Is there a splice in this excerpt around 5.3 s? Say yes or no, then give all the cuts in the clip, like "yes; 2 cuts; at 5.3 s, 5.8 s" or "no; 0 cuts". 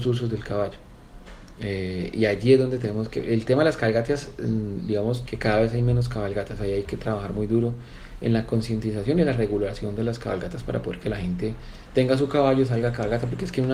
yes; 1 cut; at 5.3 s